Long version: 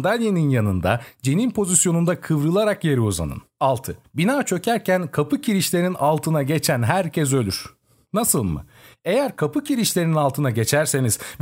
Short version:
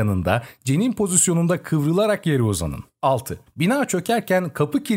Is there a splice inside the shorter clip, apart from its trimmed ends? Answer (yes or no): no